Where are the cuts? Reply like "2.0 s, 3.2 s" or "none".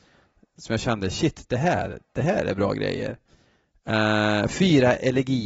none